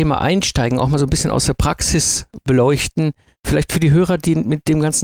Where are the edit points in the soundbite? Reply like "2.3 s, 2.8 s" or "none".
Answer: none